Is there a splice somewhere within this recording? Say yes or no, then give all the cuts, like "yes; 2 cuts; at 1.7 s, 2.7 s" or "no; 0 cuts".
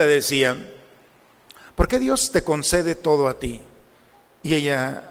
no; 0 cuts